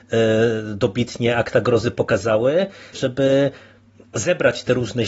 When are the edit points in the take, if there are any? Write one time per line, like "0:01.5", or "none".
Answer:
0:02.9